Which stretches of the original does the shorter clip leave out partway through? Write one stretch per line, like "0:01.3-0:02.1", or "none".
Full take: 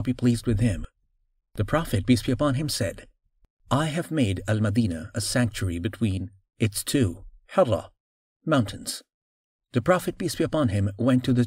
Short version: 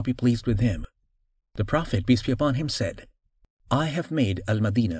none